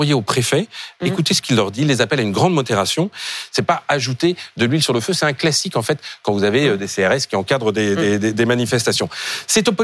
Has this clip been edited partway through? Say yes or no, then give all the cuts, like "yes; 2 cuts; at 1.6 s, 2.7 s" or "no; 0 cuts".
yes; 1 cut; at 3.5 s